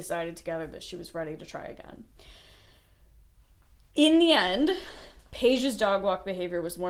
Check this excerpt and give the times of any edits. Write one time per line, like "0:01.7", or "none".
none